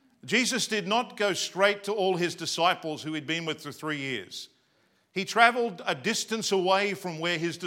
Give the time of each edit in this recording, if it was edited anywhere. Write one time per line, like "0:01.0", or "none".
none